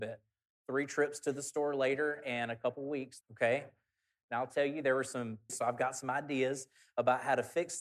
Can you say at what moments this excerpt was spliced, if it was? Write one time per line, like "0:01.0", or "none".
0:03.2
0:05.5